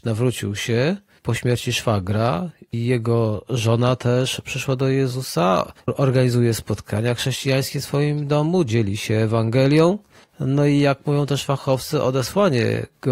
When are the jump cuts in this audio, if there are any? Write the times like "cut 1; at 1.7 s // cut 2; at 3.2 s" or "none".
none